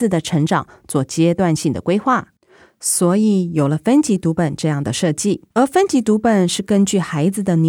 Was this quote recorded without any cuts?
no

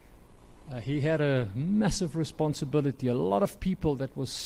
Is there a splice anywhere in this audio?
no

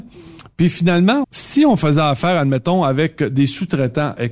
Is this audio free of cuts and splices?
no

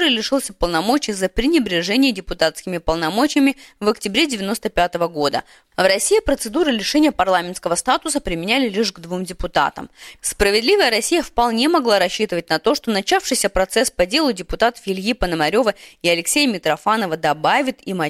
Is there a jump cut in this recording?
yes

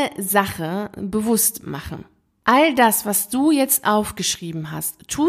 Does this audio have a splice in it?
no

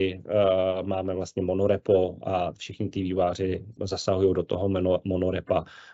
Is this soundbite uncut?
no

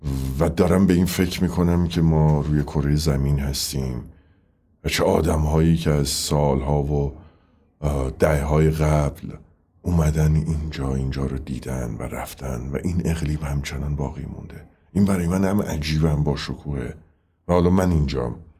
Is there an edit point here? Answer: no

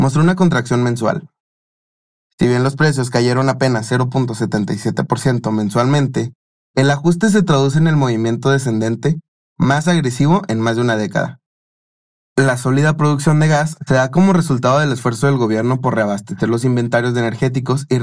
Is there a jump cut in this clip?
yes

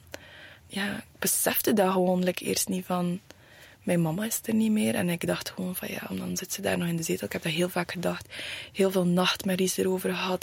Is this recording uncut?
no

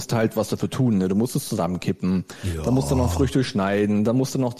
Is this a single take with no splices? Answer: yes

